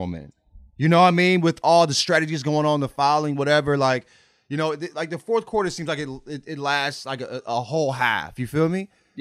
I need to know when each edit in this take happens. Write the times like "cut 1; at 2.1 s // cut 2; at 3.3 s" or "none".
none